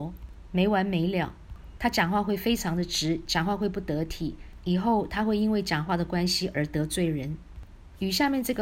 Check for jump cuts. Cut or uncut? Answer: cut